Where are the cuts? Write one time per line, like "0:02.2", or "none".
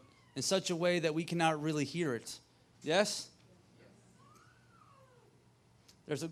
0:02.7

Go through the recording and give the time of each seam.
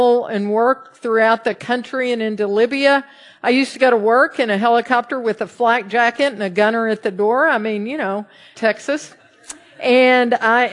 0:08.5

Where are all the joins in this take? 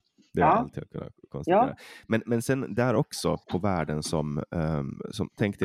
0:03.4

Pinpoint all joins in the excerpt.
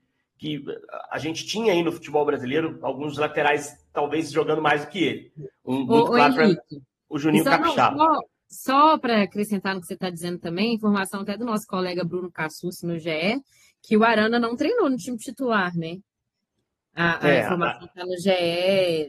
none

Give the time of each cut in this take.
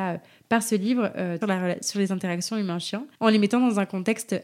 0:01.4
0:03.1

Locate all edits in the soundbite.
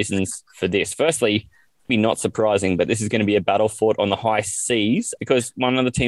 0:01.9
0:05.2

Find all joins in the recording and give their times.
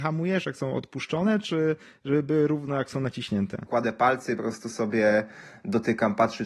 0:03.7

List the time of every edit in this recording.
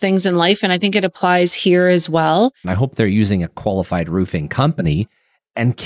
0:02.6

